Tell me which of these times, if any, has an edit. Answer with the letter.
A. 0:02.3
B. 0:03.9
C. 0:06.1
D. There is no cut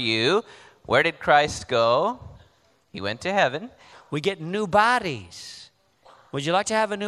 B